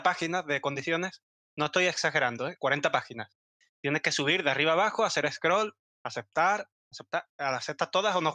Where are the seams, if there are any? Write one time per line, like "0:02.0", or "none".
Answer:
none